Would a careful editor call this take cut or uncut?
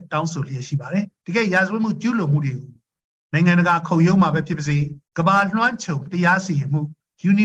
uncut